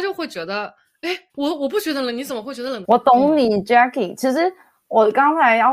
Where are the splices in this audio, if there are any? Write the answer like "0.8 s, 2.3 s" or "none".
1.3 s, 2.8 s